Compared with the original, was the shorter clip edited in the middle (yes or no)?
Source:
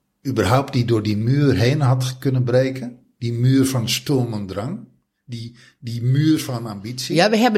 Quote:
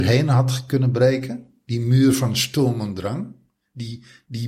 no